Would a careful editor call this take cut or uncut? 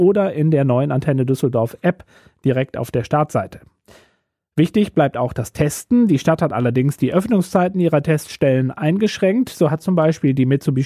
uncut